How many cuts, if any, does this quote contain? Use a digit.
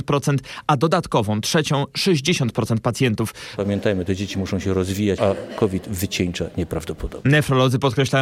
2